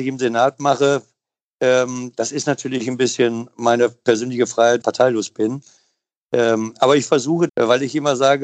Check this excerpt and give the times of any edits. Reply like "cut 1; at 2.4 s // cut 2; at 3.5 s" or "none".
cut 1; at 4.8 s // cut 2; at 7.5 s

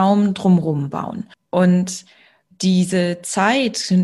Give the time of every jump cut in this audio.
cut 1; at 1.3 s

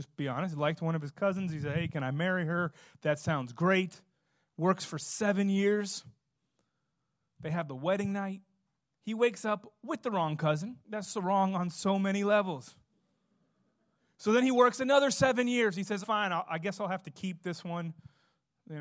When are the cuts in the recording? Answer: cut 1; at 10.8 s // cut 2; at 16.0 s

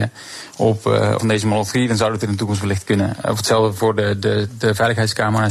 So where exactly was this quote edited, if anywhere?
cut 1; at 1.2 s

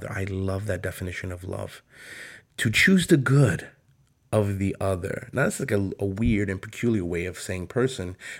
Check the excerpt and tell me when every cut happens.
cut 1; at 2.4 s

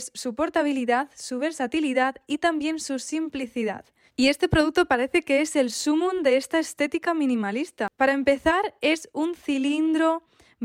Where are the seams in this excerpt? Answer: cut 1; at 4.1 s

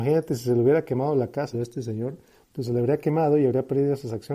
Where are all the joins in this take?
cut 1; at 1.5 s

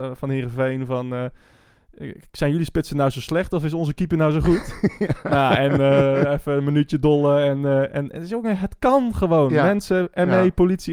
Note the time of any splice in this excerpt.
none

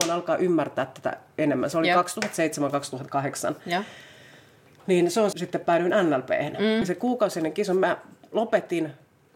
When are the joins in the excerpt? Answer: cut 1; at 5.3 s // cut 2; at 6.8 s

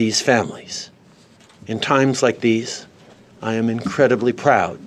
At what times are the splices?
cut 1; at 1.6 s

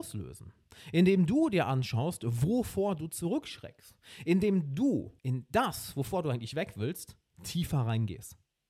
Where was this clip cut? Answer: cut 1; at 5.2 s

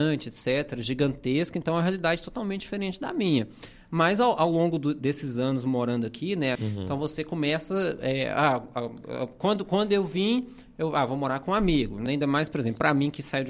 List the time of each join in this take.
cut 1; at 6.6 s // cut 2; at 12.1 s

